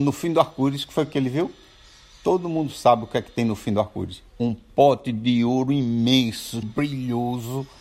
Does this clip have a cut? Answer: yes; 2 cuts; at 4.3 s, 6.6 s

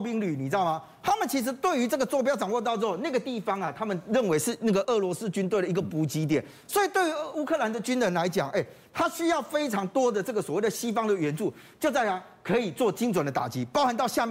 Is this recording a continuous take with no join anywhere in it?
no; 2 cuts; at 4.8 s, 6.7 s

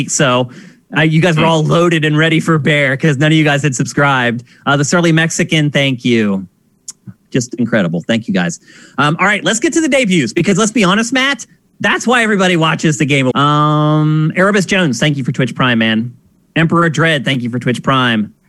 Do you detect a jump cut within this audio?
yes; 1 cut; at 13.3 s

